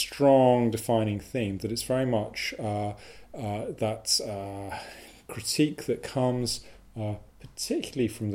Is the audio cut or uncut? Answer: uncut